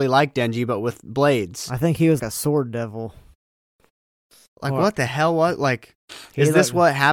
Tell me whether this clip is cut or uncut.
cut